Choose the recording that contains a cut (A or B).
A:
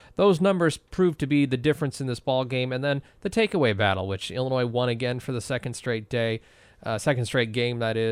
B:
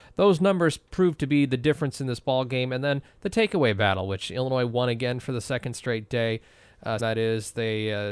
B